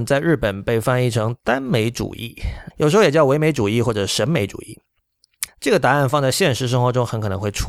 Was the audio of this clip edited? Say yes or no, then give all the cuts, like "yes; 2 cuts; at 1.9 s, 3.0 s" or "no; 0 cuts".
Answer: yes; 2 cuts; at 2.7 s, 5.5 s